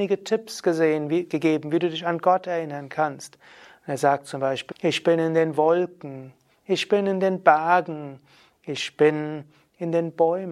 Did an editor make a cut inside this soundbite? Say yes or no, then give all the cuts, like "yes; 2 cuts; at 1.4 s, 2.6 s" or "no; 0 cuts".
yes; 1 cut; at 4.7 s